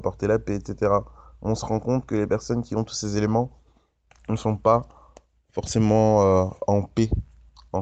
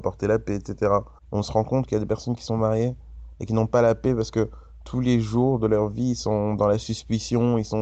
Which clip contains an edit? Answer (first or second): second